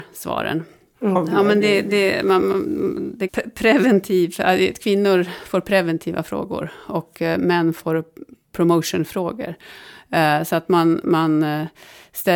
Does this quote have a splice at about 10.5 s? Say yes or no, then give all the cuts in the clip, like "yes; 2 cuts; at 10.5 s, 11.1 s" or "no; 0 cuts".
no; 2 cuts; at 1.2 s, 3.3 s